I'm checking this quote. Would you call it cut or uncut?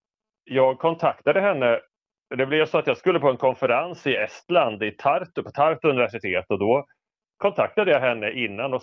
uncut